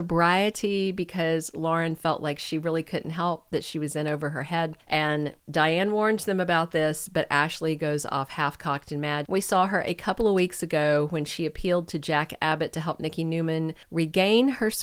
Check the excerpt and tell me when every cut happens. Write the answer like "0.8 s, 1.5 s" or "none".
4.9 s, 9.2 s